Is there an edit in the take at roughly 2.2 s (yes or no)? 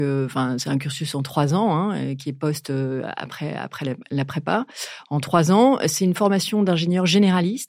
no